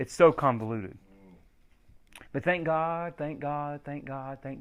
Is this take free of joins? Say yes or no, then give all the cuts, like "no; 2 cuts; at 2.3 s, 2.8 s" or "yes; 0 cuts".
no; 1 cut; at 2.3 s